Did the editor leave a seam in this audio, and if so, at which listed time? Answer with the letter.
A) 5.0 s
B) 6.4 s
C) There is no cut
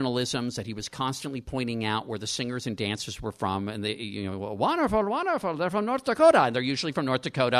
C